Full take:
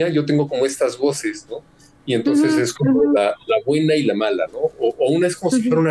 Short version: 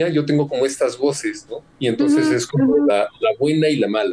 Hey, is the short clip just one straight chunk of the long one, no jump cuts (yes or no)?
no